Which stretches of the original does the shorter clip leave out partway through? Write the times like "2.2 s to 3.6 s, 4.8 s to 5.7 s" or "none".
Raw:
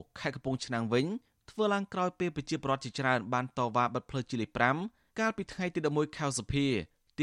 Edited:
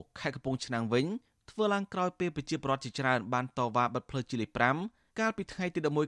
none